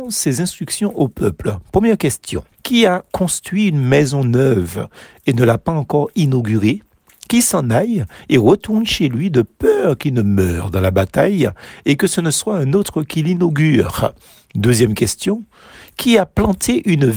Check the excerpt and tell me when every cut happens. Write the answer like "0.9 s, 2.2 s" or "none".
2.5 s